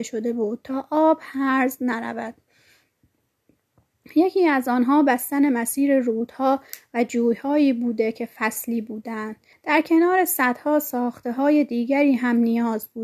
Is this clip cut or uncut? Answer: cut